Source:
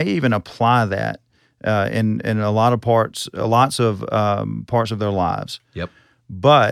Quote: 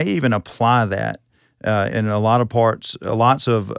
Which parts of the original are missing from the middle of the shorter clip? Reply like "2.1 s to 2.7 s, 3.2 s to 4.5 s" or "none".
1.9 s to 2.2 s